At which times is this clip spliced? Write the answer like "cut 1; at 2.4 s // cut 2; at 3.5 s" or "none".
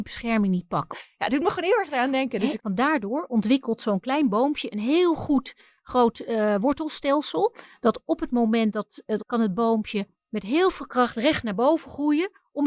cut 1; at 0.9 s // cut 2; at 2.6 s // cut 3; at 9.2 s